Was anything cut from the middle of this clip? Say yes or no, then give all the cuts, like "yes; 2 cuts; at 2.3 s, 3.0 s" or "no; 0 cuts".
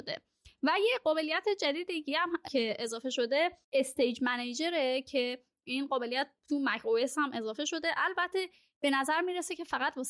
yes; 1 cut; at 3.6 s